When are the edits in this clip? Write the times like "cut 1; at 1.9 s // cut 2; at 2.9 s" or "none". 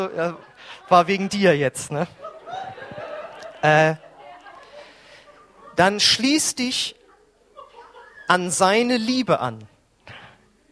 none